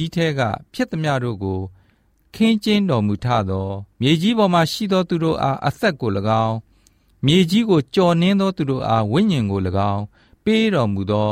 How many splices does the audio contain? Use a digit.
1